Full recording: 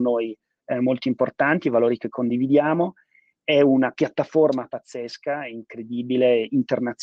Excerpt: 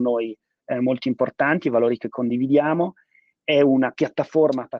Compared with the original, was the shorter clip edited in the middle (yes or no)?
no